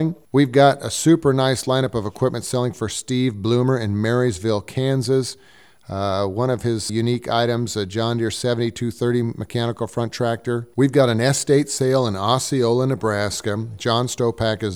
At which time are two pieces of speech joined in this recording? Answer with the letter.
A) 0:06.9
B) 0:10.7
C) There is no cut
A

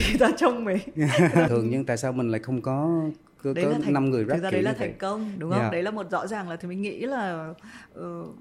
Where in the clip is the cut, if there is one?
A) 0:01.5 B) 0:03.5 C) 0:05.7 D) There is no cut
A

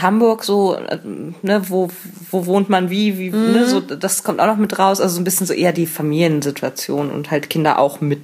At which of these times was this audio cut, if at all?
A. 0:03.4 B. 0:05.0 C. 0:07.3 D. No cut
D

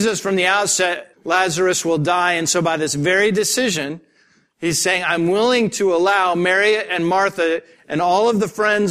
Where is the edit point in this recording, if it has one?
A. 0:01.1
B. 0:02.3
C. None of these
A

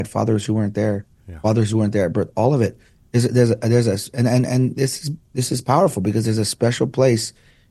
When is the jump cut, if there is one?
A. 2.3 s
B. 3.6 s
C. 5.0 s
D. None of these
D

